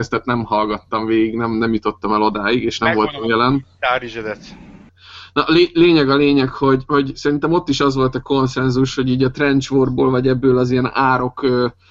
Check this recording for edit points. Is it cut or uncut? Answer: cut